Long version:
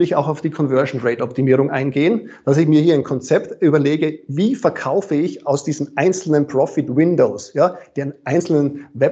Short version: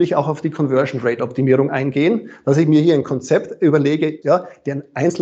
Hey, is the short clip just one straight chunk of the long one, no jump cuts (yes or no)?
no